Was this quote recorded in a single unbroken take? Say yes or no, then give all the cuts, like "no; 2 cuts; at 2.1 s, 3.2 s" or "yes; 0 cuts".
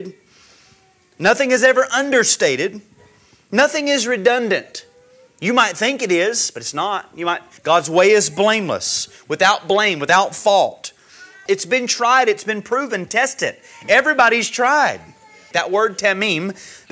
no; 3 cuts; at 7.6 s, 11.5 s, 15.5 s